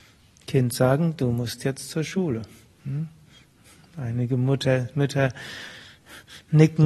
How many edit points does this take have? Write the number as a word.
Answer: zero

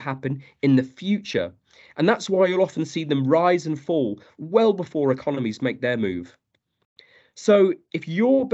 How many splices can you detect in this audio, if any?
zero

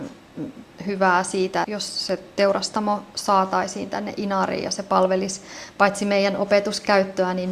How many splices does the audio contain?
one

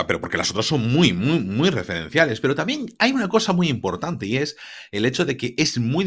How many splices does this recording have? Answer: zero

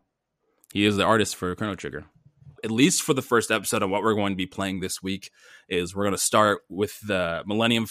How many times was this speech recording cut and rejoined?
one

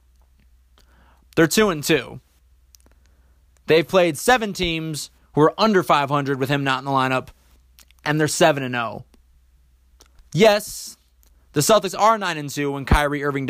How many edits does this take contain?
two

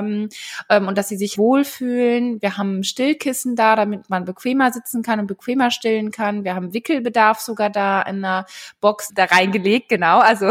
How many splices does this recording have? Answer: two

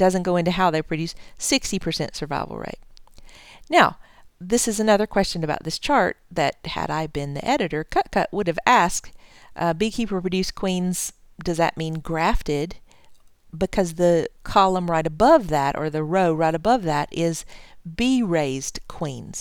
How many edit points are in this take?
one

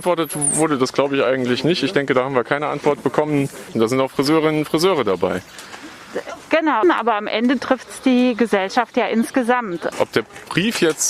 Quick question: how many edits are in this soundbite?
three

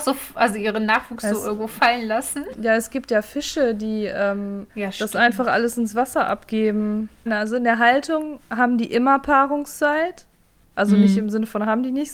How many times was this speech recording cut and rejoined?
two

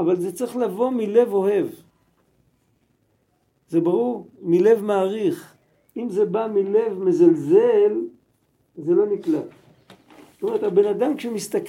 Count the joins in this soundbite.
zero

